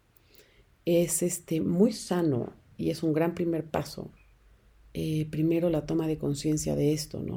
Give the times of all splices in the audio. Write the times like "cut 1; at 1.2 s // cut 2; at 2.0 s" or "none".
none

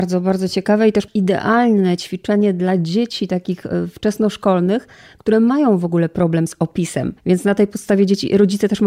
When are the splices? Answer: cut 1; at 7.2 s

